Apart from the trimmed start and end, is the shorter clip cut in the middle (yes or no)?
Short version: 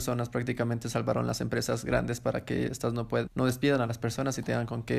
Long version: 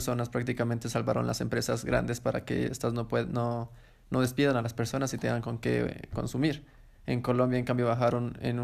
yes